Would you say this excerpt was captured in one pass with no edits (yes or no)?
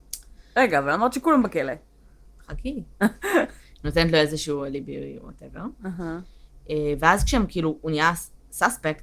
yes